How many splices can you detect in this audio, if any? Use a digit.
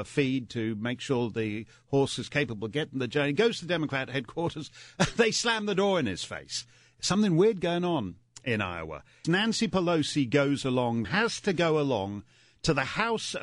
2